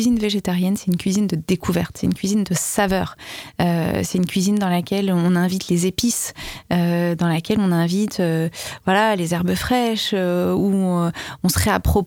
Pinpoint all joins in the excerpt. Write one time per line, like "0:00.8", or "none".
none